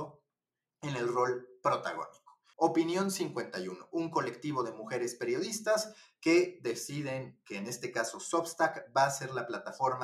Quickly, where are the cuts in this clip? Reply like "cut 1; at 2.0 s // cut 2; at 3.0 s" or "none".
cut 1; at 2.5 s